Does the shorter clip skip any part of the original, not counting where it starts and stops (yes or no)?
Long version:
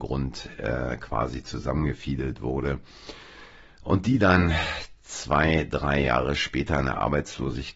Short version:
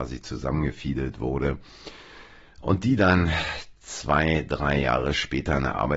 no